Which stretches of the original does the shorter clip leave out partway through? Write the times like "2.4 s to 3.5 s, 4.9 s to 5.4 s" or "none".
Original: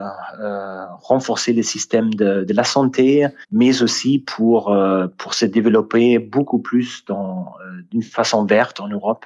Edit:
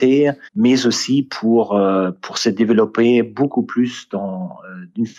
none

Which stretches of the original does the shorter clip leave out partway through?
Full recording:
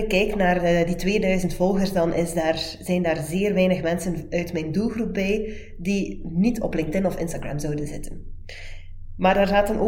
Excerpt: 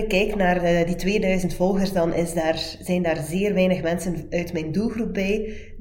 none

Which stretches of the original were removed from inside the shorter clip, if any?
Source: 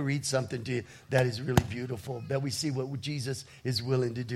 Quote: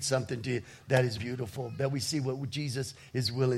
1.4 s to 1.7 s

